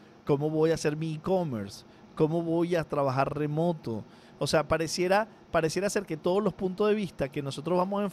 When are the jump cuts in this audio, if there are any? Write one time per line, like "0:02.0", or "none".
none